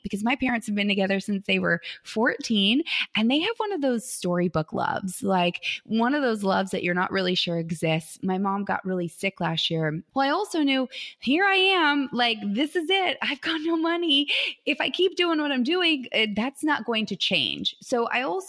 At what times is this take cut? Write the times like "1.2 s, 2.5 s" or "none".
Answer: 10.1 s